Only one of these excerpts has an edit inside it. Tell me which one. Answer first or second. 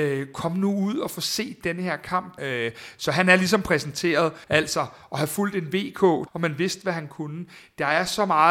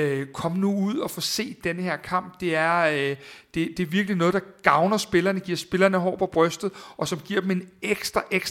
first